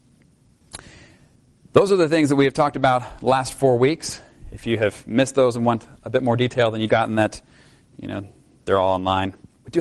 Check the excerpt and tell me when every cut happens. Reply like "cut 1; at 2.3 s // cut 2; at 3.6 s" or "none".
cut 1; at 6.9 s // cut 2; at 8.6 s